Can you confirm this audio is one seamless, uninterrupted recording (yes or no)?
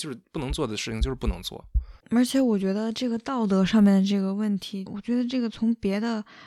no